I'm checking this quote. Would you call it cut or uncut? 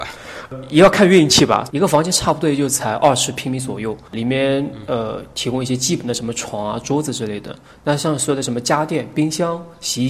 cut